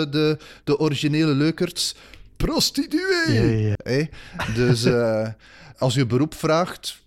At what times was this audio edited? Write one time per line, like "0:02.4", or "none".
0:03.8
0:05.7